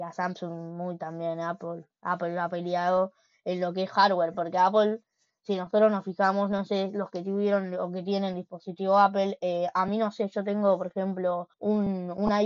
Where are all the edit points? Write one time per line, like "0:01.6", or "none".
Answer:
0:11.5